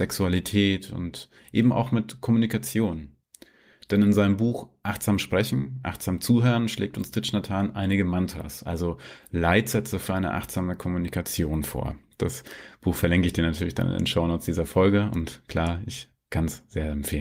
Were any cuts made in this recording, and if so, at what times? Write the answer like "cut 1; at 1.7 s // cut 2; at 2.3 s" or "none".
none